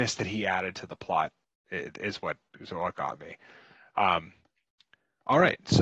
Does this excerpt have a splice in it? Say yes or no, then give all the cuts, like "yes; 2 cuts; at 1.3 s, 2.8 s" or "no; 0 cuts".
no; 0 cuts